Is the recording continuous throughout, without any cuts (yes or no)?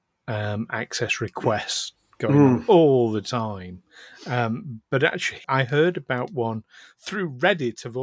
no